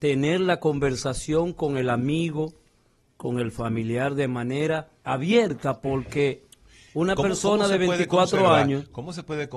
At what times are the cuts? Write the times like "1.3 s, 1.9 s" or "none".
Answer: 3.1 s, 5.0 s